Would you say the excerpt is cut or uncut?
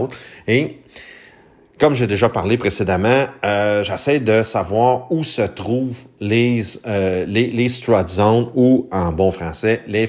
uncut